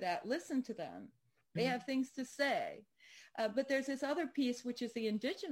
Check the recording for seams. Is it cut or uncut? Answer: uncut